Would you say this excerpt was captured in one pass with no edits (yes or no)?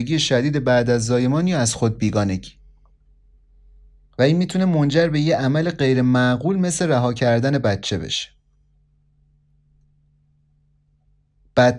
yes